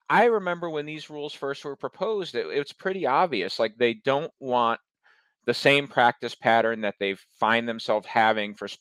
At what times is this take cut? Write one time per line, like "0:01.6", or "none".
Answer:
none